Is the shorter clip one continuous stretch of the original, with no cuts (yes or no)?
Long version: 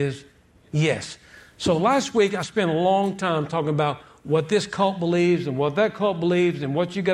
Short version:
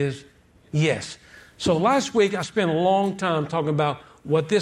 yes